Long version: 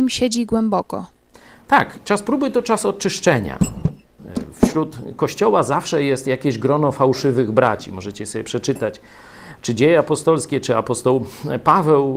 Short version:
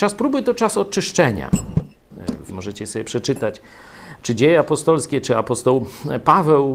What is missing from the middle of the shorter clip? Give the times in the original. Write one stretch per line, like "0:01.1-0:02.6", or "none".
0:04.6-0:07.9